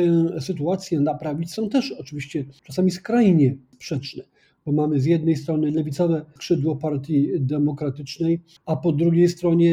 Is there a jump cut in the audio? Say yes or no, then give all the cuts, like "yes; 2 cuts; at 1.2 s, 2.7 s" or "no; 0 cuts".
no; 0 cuts